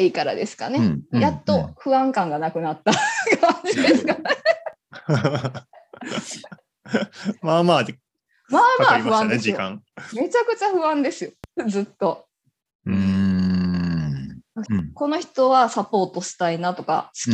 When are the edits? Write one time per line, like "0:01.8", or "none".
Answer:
0:12.7
0:14.7